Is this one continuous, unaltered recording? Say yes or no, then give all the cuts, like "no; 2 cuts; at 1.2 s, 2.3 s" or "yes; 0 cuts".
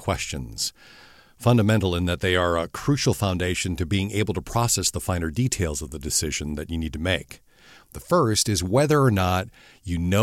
yes; 0 cuts